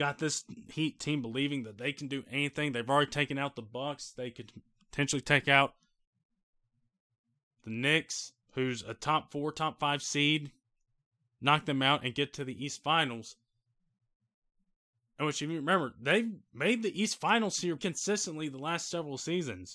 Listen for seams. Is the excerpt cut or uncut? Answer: cut